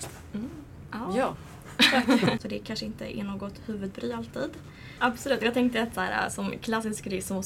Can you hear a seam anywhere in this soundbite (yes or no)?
yes